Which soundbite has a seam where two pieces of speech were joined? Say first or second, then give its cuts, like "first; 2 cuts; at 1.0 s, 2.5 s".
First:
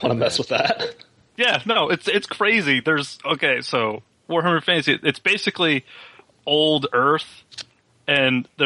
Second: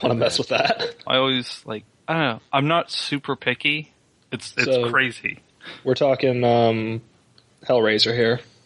second; 2 cuts; at 1.1 s, 4.2 s